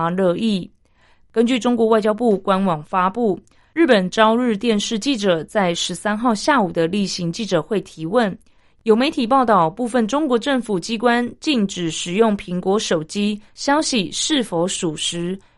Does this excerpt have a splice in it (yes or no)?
no